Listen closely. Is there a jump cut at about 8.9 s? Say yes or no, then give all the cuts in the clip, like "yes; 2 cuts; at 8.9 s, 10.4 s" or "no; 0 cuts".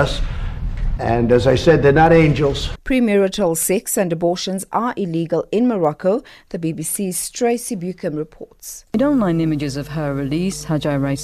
no; 2 cuts; at 1.0 s, 2.7 s